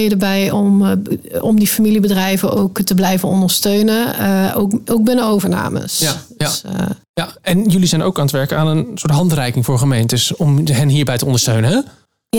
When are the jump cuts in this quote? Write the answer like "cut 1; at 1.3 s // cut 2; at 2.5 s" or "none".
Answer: none